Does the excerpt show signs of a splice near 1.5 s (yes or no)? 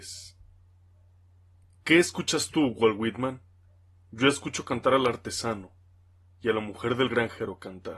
no